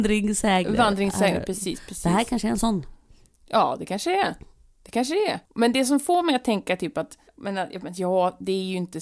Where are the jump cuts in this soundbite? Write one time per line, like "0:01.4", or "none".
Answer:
0:05.4
0:07.3